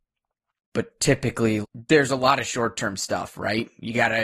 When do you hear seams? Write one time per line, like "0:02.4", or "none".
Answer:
0:01.6